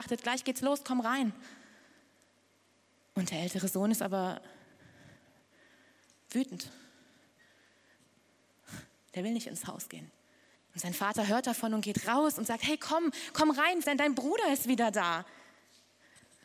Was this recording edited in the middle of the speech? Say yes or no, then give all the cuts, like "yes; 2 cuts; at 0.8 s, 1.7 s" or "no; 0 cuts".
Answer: yes; 2 cuts; at 10.6 s, 13.8 s